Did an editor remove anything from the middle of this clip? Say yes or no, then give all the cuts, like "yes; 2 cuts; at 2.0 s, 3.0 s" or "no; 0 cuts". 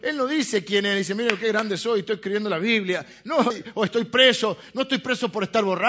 yes; 1 cut; at 3.5 s